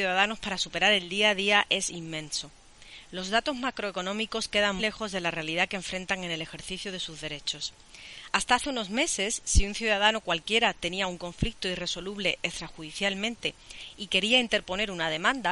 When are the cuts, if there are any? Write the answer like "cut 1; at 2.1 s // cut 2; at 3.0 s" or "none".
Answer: cut 1; at 4.8 s // cut 2; at 8.3 s